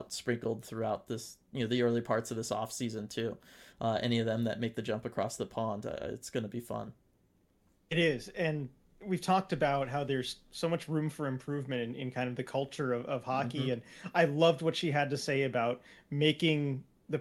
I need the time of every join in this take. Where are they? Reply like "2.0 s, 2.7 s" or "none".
none